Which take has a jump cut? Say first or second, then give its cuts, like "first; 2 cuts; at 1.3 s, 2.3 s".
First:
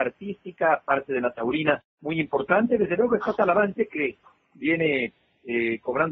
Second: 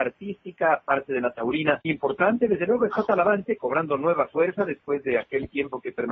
second; 2 cuts; at 1.8 s, 3.6 s